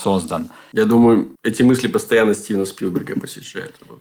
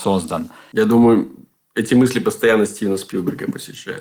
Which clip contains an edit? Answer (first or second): first